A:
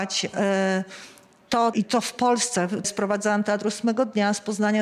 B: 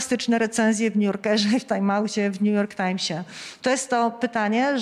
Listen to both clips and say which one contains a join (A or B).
A